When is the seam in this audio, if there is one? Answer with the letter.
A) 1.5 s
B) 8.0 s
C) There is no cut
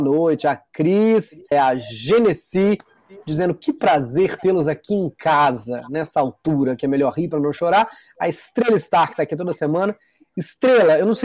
A